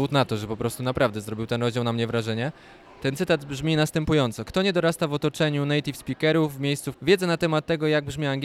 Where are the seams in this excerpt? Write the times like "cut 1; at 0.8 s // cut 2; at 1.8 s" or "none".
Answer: cut 1; at 6.9 s